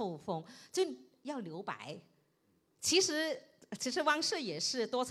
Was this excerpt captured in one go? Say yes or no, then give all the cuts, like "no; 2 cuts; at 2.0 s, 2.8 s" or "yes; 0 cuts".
yes; 0 cuts